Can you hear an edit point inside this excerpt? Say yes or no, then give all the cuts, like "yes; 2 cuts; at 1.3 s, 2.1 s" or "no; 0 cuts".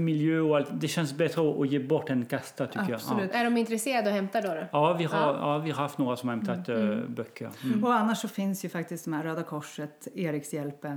no; 0 cuts